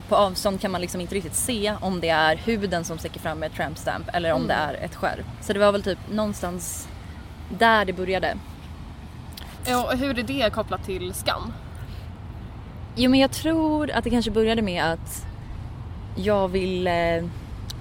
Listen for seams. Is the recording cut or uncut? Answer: cut